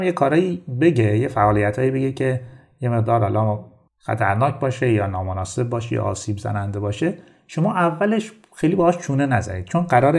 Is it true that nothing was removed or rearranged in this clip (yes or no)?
yes